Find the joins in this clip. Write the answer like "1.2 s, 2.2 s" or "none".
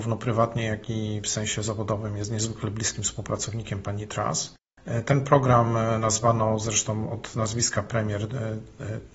none